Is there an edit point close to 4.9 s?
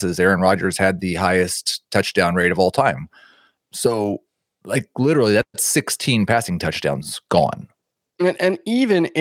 no; 1 cut; at 3.6 s

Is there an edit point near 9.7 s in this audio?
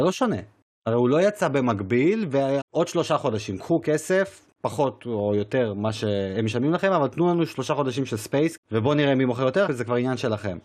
yes; 3 cuts; at 2.6 s, 8.6 s, 9.7 s

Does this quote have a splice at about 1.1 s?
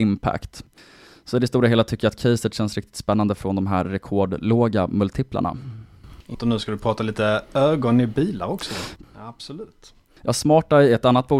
no; 2 cuts; at 6.3 s, 9.0 s

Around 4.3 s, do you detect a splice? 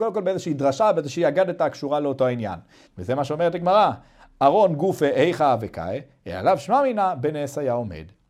no; 1 cut; at 2.9 s

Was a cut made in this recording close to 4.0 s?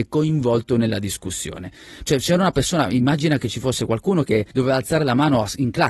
no; 1 cut; at 2.1 s

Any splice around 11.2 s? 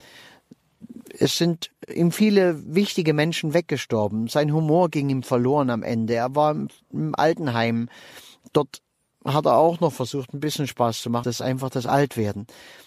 yes; 1 cut; at 11.2 s

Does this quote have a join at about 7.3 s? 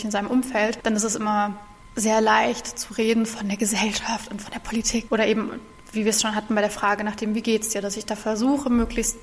no; 1 cut; at 5.1 s

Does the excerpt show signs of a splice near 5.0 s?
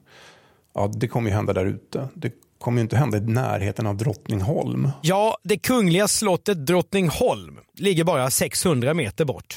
no; 1 cut; at 7.7 s

